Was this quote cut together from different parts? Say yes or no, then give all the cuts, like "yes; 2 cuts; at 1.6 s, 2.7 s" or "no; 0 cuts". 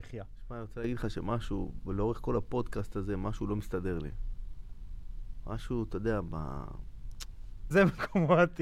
yes; 1 cut; at 7.7 s